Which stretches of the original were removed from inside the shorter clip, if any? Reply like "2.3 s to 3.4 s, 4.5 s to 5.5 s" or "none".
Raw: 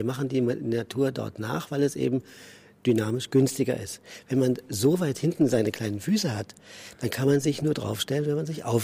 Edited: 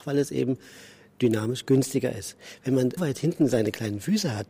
4.6 s to 5.0 s